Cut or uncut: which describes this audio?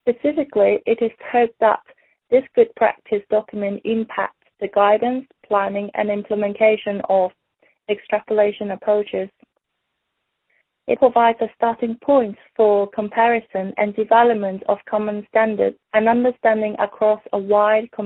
cut